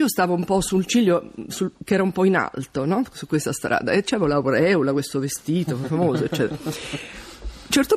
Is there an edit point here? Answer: no; 0 cuts

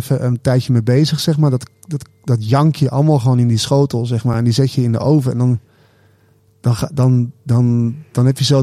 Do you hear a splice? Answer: no; 0 cuts

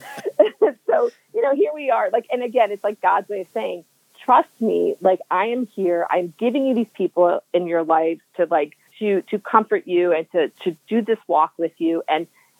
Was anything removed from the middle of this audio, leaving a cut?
yes; 2 cuts; at 8.9 s, 10.6 s

